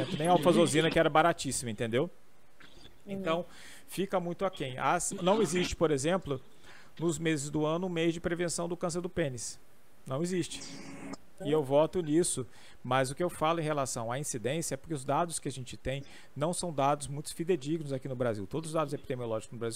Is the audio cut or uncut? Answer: cut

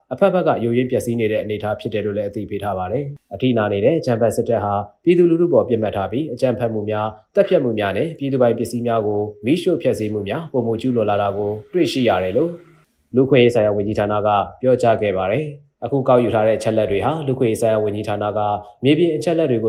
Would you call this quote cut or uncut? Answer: cut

